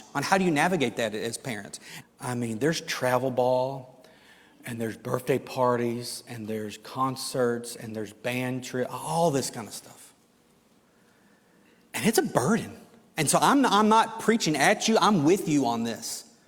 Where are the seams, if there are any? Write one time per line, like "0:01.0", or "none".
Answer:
0:02.0